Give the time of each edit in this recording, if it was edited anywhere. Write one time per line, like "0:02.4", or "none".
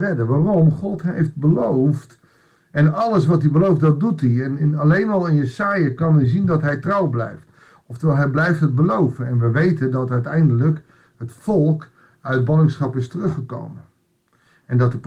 0:04.6